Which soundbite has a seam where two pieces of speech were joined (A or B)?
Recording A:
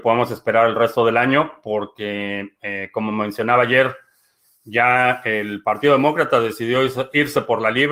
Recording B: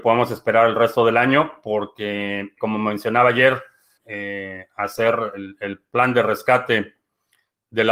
B